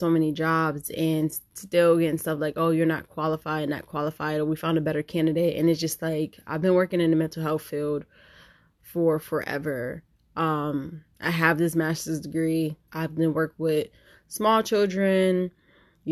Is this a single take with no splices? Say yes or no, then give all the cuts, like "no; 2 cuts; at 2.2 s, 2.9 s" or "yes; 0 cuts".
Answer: no; 1 cut; at 12.9 s